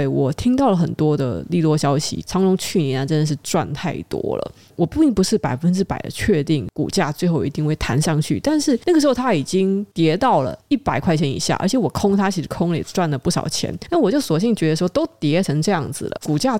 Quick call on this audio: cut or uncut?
uncut